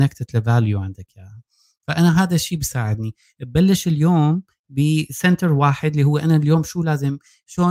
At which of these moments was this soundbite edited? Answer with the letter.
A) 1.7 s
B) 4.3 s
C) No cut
C